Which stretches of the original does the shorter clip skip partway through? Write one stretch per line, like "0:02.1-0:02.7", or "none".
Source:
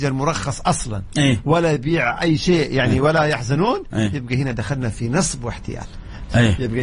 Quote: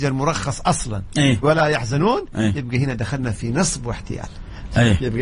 0:01.4-0:03.0